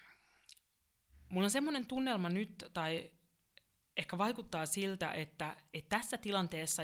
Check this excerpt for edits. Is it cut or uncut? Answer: uncut